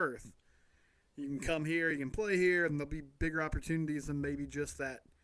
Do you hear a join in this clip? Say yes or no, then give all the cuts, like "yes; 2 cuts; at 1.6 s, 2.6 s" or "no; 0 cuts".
no; 0 cuts